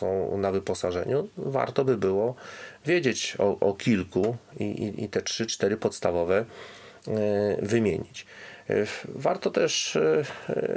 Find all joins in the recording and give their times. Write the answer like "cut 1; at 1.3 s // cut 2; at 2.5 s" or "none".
none